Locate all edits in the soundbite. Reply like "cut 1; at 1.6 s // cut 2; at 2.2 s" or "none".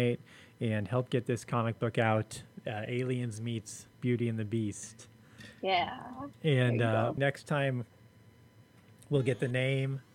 cut 1; at 7.2 s